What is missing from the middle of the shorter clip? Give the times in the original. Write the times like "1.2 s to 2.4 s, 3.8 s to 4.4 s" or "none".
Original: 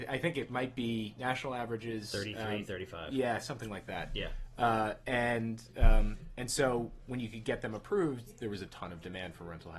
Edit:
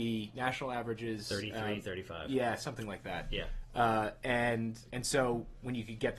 5.7 s to 6.4 s